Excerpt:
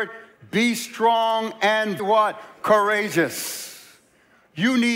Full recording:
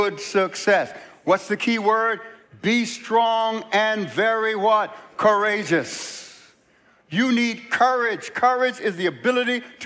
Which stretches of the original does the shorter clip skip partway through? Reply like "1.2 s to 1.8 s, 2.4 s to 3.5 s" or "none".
4.1 s to 4.5 s